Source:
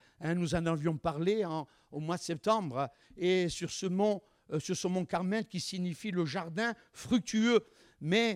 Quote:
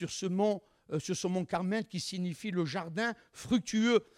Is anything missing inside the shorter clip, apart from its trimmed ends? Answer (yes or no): no